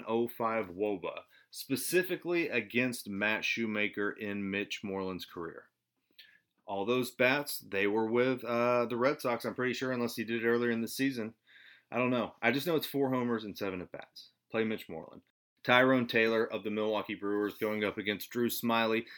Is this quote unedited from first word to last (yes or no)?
yes